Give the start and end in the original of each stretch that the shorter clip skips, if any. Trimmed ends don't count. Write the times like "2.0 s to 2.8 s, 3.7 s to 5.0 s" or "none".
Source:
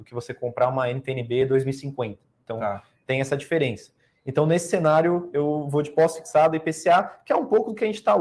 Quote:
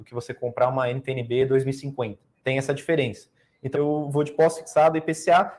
2.3 s to 3.0 s, 4.4 s to 5.3 s